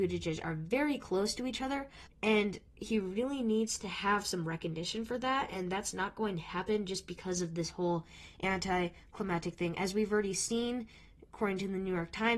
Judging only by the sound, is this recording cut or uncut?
cut